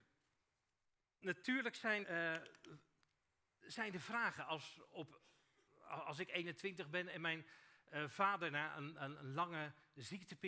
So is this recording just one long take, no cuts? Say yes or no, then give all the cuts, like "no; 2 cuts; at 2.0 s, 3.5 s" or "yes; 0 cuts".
no; 2 cuts; at 2.0 s, 5.7 s